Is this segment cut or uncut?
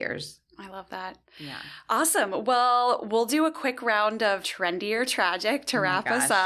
cut